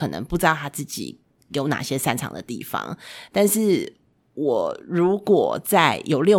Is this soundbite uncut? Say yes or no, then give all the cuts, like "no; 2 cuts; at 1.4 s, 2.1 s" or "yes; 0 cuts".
yes; 0 cuts